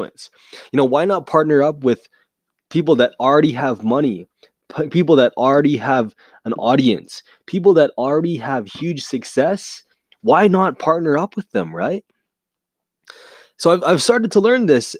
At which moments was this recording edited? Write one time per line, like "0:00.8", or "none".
none